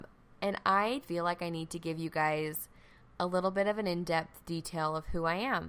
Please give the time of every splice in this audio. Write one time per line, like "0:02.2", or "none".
0:01.0